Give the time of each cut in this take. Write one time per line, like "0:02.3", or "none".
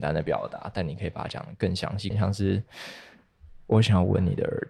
0:02.1